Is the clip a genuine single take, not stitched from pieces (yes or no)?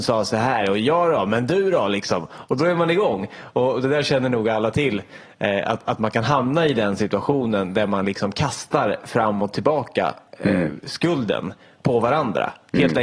yes